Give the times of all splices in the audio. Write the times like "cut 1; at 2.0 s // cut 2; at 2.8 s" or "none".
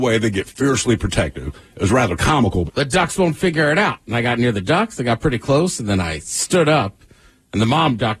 cut 1; at 2.7 s